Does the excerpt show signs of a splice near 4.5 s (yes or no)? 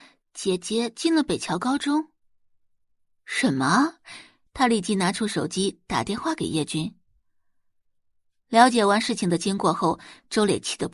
yes